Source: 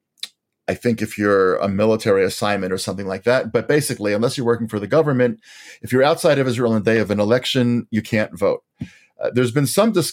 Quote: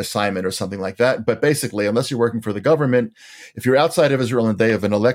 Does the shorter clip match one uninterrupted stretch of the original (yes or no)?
yes